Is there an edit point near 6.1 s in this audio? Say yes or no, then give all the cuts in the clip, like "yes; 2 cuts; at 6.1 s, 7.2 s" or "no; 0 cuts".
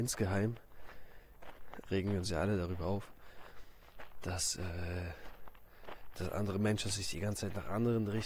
yes; 2 cuts; at 1.9 s, 6.1 s